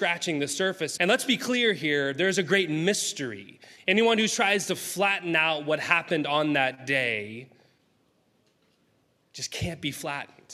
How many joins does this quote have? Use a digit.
1